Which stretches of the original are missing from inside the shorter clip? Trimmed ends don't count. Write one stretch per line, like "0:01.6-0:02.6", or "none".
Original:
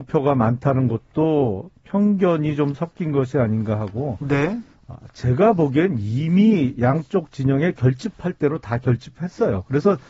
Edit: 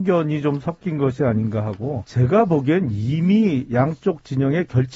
0:04.2-0:05.1